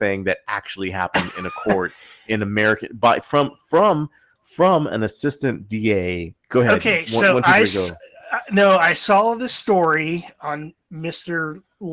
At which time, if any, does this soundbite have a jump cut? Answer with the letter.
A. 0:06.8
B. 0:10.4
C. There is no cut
B